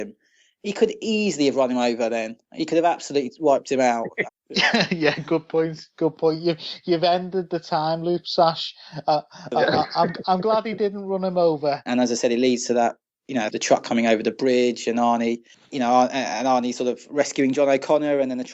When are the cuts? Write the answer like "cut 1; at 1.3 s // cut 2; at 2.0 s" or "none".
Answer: cut 1; at 4.3 s // cut 2; at 11.9 s // cut 3; at 13.5 s